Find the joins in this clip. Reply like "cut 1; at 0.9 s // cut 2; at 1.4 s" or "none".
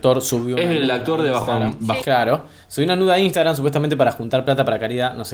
cut 1; at 2.0 s